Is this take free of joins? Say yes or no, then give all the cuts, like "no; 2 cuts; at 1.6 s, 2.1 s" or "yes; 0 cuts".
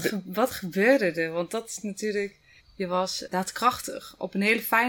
no; 1 cut; at 2.6 s